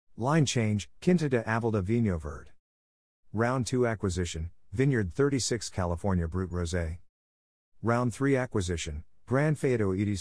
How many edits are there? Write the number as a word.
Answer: one